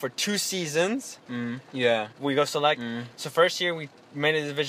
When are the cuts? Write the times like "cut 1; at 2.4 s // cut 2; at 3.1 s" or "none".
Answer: cut 1; at 1.7 s